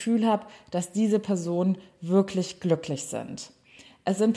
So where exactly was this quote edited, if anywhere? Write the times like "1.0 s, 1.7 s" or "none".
none